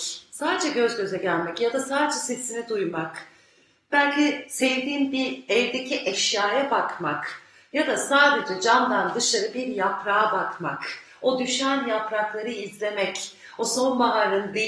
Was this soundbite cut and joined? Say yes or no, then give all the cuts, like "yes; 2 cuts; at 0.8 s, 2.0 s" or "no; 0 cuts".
no; 0 cuts